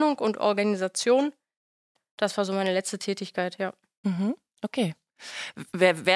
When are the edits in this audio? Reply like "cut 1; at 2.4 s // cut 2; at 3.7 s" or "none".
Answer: none